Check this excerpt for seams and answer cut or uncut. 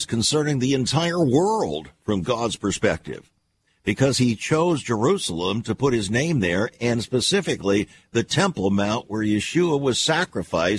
uncut